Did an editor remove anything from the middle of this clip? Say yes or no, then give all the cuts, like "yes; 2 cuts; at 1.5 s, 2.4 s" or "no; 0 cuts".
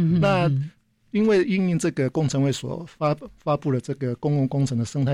no; 0 cuts